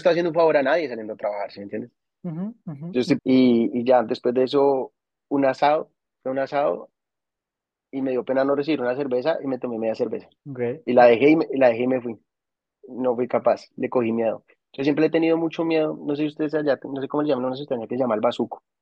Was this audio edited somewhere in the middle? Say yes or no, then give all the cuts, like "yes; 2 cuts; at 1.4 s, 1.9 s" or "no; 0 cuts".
yes; 2 cuts; at 3.2 s, 10.4 s